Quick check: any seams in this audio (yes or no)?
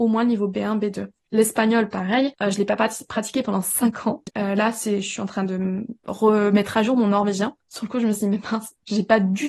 yes